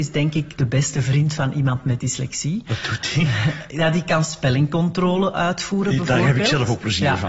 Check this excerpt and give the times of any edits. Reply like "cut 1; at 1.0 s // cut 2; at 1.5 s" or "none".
none